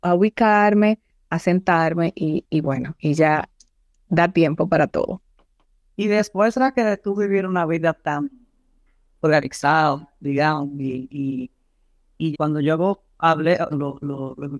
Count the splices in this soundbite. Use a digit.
2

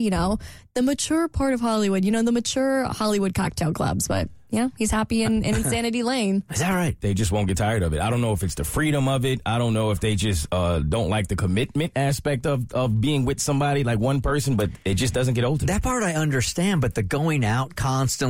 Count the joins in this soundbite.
1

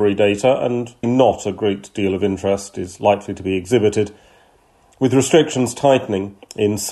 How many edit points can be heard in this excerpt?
1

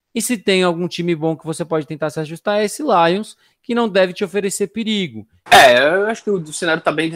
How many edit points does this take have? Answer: 1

